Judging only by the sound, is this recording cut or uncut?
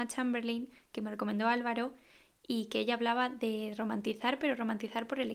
uncut